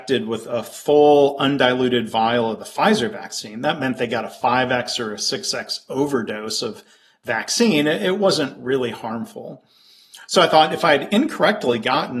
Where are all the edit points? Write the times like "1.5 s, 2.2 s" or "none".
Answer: none